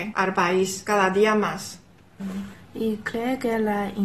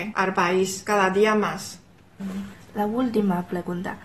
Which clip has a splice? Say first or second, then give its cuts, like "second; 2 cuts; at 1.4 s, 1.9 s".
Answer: first; 1 cut; at 2.6 s